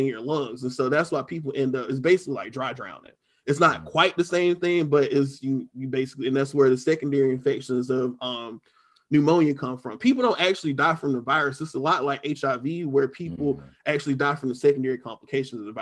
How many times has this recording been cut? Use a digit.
0